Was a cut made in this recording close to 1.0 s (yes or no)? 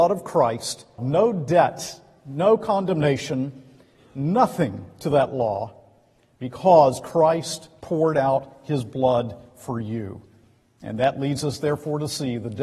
yes